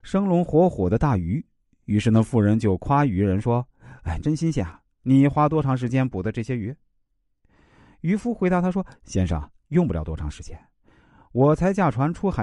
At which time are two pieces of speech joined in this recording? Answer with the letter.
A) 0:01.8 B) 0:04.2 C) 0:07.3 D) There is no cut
B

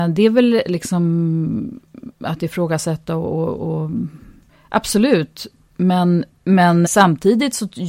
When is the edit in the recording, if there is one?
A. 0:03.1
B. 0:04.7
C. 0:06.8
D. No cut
C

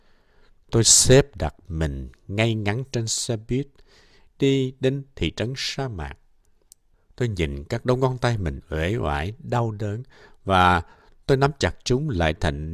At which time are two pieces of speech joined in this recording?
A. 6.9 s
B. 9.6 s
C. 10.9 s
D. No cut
A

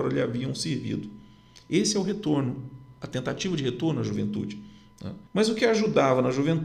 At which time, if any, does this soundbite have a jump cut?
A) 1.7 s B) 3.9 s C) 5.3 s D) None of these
C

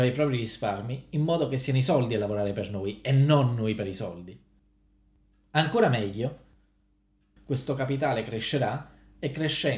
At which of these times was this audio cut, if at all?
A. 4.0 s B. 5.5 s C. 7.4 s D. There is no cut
C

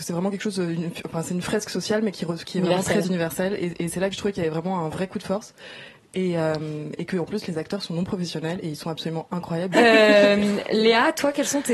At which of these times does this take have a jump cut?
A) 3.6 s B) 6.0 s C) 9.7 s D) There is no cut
C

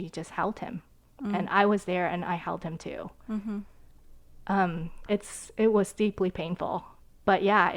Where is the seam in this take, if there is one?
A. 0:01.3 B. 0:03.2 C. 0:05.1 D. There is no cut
C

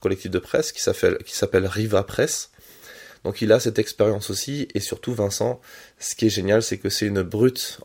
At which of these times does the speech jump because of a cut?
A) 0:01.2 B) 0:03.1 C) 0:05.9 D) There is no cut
B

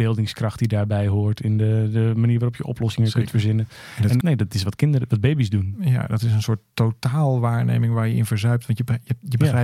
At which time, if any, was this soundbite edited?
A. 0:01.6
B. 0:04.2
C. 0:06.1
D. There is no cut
B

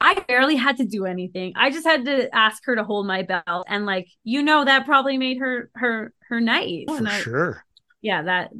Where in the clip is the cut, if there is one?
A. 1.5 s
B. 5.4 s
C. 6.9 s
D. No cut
C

